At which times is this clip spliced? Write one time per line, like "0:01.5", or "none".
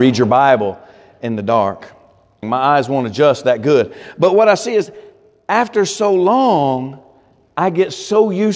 0:02.4